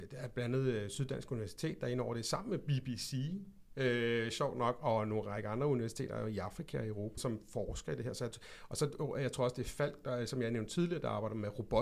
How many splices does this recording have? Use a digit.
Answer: 1